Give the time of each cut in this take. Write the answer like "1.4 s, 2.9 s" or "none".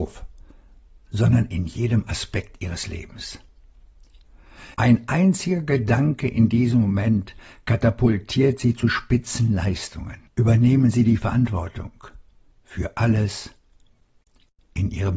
4.7 s, 10.3 s